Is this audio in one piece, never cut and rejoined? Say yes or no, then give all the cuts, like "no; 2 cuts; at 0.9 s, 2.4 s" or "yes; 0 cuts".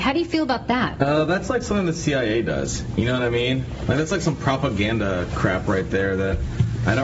yes; 0 cuts